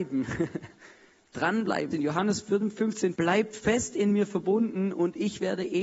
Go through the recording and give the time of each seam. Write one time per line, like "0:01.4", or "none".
0:01.9
0:03.1